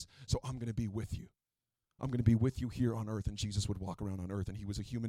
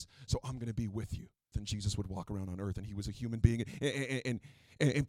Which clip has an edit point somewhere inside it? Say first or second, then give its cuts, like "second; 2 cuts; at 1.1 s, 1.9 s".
second; 1 cut; at 1.5 s